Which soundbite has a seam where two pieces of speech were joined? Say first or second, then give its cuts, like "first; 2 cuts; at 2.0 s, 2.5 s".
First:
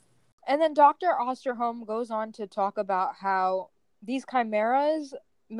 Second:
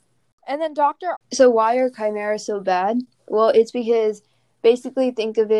second; 1 cut; at 1.1 s